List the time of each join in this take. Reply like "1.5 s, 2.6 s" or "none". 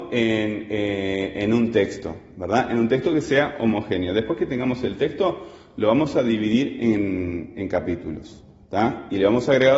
none

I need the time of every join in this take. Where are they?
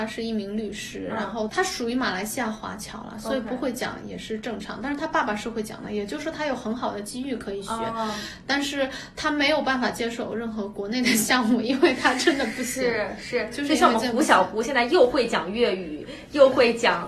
1.5 s

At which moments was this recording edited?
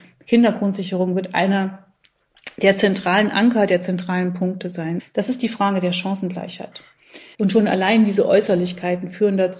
5.0 s, 7.3 s

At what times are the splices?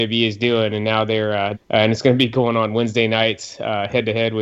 1.5 s

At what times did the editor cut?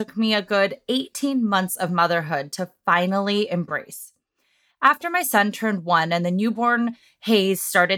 none

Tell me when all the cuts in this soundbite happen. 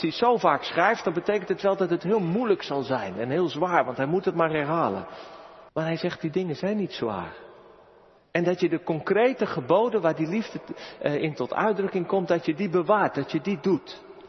5.7 s, 8.2 s

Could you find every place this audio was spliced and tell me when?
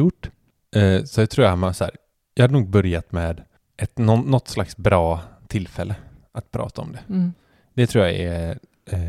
none

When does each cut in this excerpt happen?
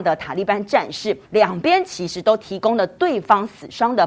1.2 s

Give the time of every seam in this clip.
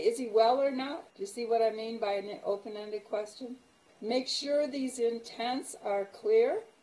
1.1 s, 3.9 s

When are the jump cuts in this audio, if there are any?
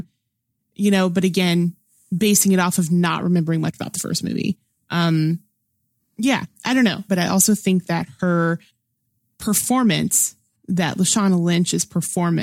7.1 s

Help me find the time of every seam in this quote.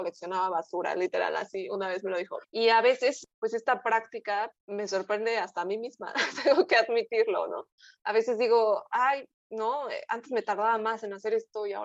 2.4 s, 4.6 s

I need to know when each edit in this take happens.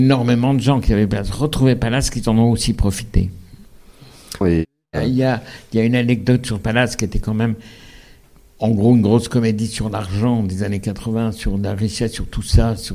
4.4 s

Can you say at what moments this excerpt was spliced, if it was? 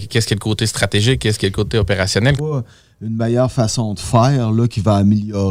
2.4 s

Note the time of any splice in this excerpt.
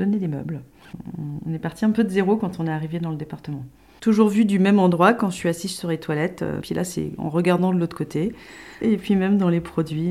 6.6 s, 8.8 s

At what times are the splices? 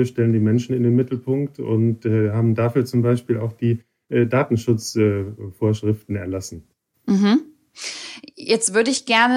none

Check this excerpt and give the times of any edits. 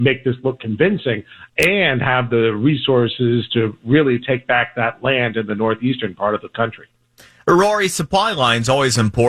none

